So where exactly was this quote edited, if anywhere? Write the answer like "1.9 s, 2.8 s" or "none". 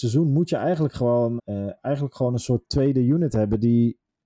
1.4 s